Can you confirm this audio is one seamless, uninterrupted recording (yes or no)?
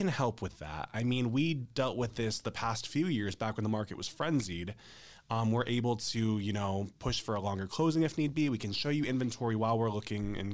yes